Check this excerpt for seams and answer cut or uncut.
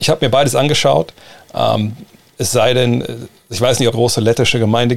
cut